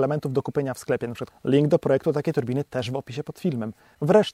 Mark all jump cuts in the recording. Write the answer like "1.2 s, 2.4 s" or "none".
1.3 s